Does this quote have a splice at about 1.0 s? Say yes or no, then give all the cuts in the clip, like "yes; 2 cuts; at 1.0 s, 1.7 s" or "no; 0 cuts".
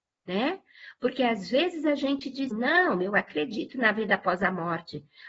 no; 1 cut; at 2.5 s